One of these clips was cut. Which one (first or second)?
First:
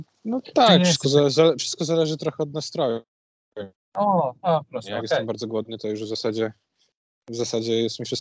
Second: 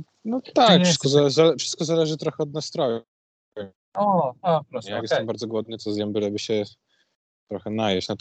second